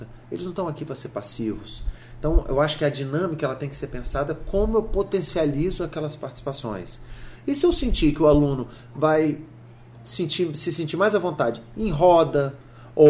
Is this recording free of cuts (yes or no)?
yes